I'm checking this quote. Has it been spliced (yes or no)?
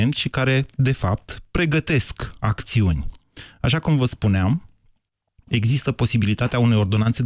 no